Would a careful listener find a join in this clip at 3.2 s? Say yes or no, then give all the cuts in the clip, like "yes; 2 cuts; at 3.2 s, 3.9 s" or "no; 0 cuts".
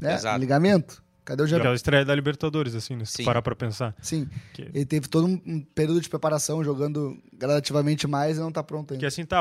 no; 1 cut; at 1.6 s